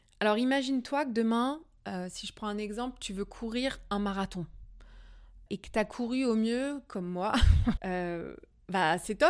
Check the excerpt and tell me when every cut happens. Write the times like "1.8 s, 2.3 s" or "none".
5.5 s, 7.8 s